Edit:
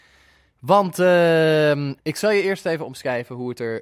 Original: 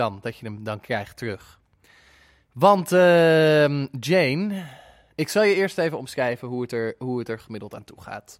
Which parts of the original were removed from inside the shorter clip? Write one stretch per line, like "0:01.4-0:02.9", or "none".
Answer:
0:03.9-0:05.1